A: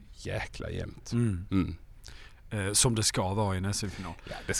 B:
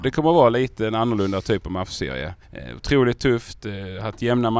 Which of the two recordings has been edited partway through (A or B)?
B